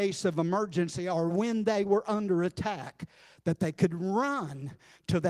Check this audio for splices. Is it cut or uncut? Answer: uncut